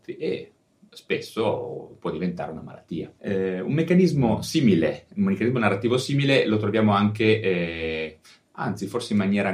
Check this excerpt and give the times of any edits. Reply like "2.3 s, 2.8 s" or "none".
3.2 s